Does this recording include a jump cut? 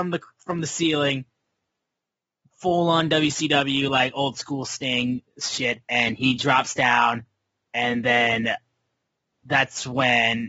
no; 0 cuts

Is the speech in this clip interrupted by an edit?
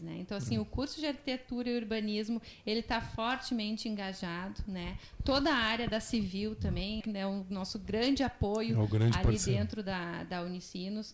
yes; 1 cut; at 7.0 s

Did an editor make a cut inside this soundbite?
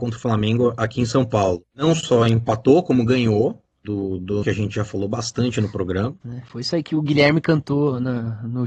yes; 2 cuts; at 4.4 s, 6.2 s

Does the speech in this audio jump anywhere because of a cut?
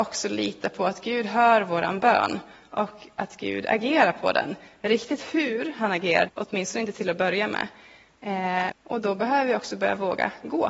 yes; 2 cuts; at 6.3 s, 8.7 s

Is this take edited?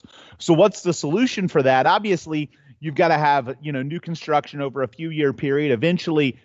no; 0 cuts

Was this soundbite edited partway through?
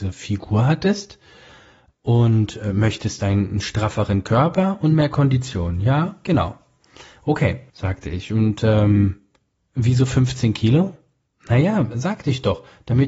yes; 1 cut; at 7.7 s

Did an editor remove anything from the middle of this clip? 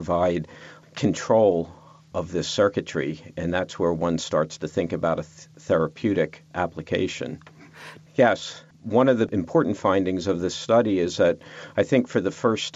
yes; 2 cuts; at 6.5 s, 8.0 s

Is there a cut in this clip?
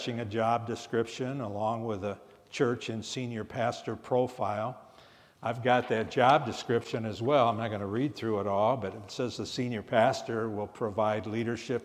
no; 0 cuts

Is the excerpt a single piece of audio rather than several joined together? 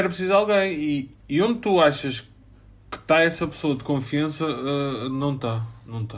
no; 1 cut; at 1.1 s

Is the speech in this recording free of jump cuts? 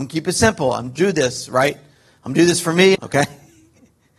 no; 1 cut; at 2.9 s

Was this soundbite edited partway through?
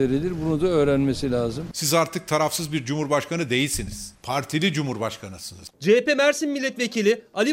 yes; 1 cut; at 5.7 s

